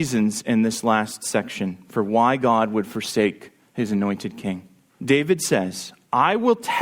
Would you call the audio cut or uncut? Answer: cut